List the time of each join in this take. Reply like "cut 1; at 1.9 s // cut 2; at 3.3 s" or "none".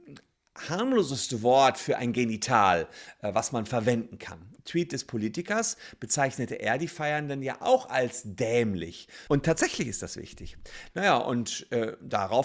cut 1; at 4.6 s // cut 2; at 9.3 s // cut 3; at 10.9 s